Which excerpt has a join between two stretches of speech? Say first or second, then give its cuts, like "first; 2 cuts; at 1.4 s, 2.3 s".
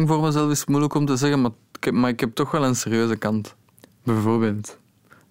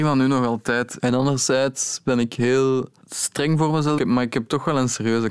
second; 2 cuts; at 1.0 s, 4.0 s